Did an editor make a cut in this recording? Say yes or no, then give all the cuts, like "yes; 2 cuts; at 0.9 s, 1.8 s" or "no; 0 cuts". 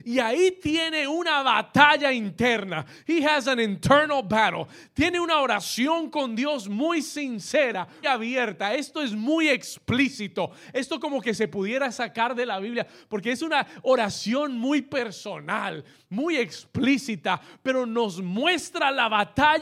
yes; 1 cut; at 8.0 s